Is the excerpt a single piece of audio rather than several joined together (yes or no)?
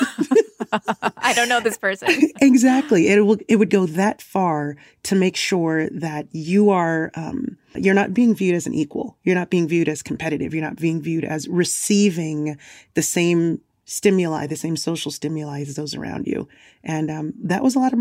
no